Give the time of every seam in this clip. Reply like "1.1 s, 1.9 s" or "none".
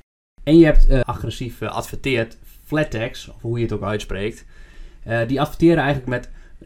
1.0 s